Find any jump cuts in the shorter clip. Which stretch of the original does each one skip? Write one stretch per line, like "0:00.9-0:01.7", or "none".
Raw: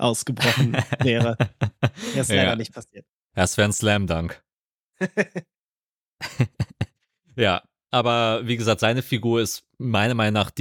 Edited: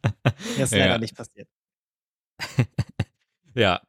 0:03.3-0:05.5